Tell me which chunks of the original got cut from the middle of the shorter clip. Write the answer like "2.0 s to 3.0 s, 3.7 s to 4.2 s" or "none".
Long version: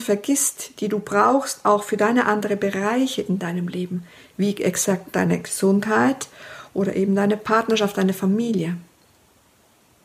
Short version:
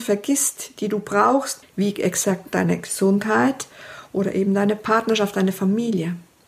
1.6 s to 4.2 s